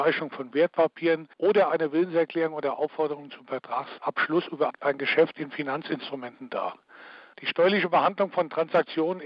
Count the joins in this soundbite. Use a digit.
2